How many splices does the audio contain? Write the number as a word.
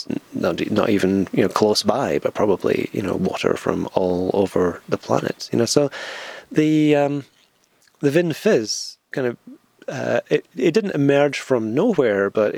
zero